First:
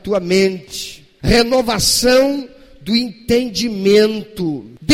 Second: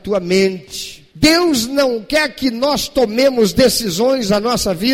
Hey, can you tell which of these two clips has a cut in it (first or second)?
second